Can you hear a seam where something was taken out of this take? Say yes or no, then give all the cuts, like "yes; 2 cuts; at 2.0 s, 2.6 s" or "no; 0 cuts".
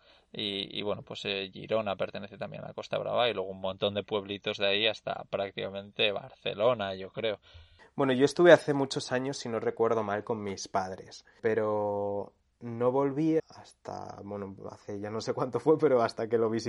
yes; 2 cuts; at 11.4 s, 13.4 s